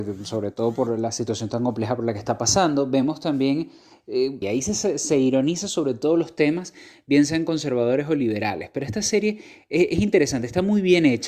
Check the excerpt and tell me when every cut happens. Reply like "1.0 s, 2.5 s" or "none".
4.4 s